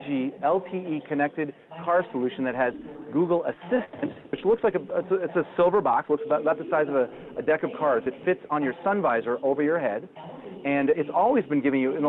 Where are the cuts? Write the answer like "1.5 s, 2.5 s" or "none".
none